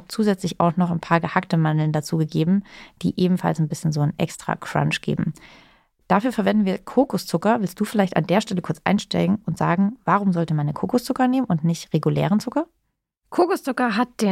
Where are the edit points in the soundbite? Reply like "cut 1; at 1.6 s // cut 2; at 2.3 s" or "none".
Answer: none